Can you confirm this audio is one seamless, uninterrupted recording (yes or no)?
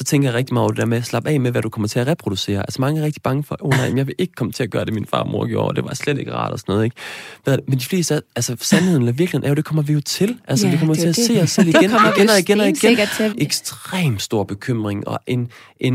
no